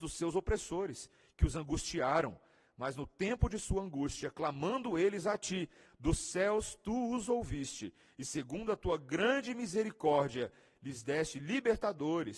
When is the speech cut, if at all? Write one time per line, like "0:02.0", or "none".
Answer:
none

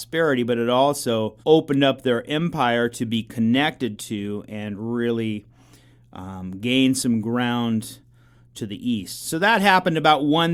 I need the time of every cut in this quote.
0:01.4

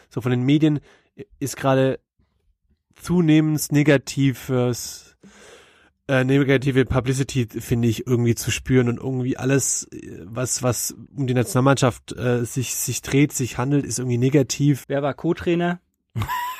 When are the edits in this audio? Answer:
0:11.1
0:14.8

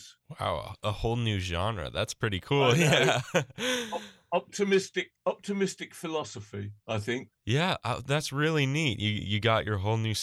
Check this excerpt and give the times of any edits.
none

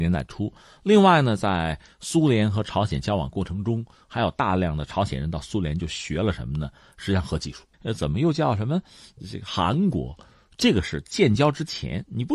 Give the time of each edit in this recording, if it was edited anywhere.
0:07.7

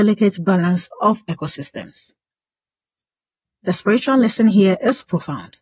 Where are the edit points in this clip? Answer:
0:03.4

